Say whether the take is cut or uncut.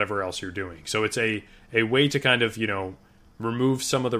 uncut